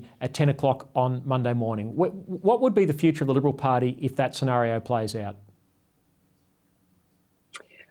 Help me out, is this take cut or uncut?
uncut